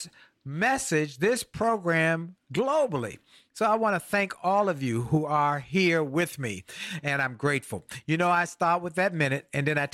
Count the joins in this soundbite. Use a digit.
0